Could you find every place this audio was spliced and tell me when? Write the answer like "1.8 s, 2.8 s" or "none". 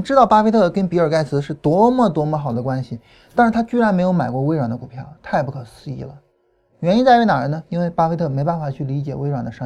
none